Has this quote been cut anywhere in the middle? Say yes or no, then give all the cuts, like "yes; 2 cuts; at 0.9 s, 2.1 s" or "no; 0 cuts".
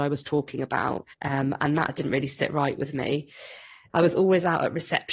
yes; 2 cuts; at 1.1 s, 3.9 s